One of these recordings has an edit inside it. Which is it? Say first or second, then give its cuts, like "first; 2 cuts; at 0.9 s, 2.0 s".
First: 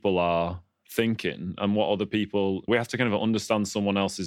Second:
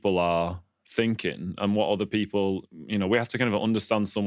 first; 1 cut; at 2.7 s